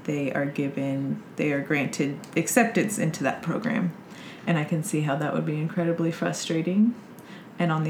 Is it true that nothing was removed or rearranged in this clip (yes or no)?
yes